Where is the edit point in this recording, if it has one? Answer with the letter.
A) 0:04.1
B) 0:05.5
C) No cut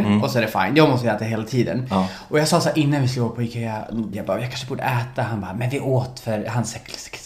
A